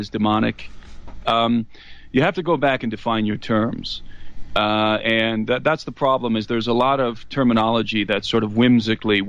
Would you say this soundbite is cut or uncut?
cut